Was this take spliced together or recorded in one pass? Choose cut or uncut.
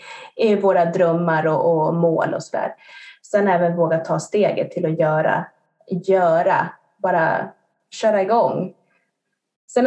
uncut